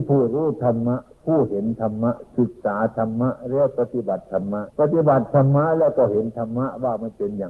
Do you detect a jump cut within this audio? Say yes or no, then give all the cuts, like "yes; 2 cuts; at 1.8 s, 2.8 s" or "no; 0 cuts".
yes; 1 cut; at 4.7 s